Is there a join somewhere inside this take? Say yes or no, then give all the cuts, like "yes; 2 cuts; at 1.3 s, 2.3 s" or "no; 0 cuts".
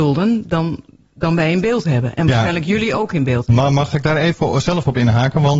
no; 0 cuts